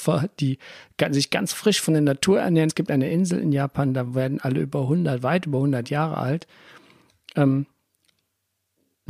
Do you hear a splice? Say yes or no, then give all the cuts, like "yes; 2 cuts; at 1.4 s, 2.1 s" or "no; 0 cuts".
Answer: no; 0 cuts